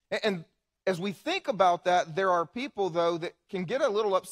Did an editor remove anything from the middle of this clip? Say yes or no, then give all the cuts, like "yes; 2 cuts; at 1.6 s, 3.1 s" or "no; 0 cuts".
no; 0 cuts